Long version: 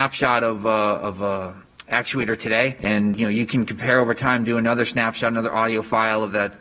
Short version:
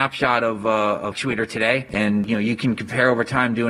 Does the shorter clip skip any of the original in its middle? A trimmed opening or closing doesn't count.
yes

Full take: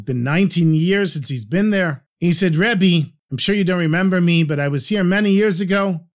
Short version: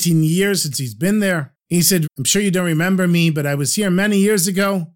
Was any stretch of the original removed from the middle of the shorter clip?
yes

